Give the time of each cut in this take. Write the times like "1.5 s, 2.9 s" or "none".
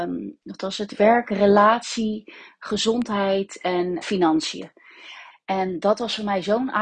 4.0 s, 5.3 s